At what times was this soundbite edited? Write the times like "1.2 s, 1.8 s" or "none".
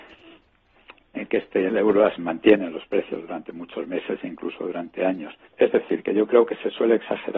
2.2 s, 5.5 s